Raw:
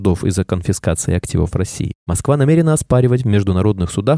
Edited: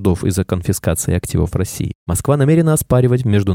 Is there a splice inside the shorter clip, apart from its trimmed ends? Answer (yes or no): no